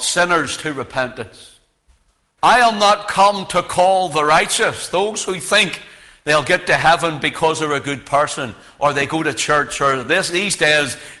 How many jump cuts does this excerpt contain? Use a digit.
1